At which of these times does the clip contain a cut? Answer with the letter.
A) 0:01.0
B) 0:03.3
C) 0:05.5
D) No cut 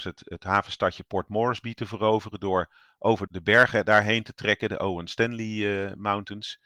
B